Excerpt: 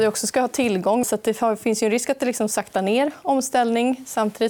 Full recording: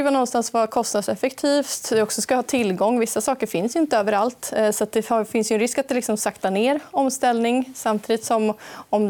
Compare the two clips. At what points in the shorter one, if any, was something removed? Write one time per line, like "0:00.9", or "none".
0:01.0